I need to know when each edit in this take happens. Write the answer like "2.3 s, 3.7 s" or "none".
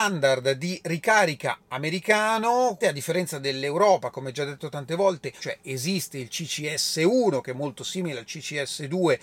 2.8 s, 5.4 s